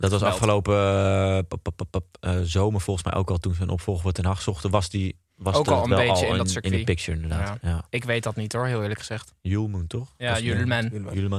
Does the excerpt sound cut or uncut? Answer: uncut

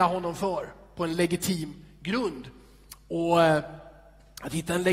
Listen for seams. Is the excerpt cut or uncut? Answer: uncut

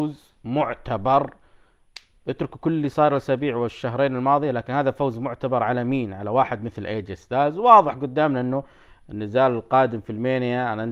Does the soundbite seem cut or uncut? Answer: uncut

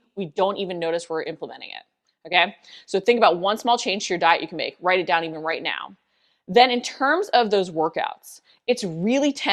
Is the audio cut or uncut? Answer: uncut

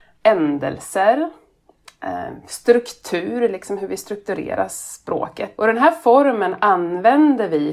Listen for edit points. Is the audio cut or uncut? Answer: cut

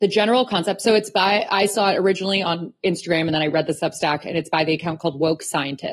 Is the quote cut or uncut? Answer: uncut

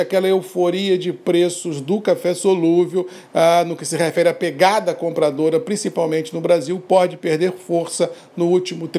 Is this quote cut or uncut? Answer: uncut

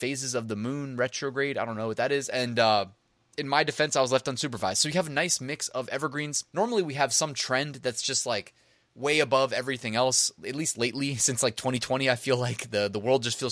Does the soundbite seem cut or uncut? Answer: cut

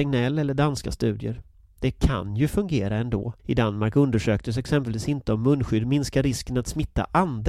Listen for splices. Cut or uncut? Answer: cut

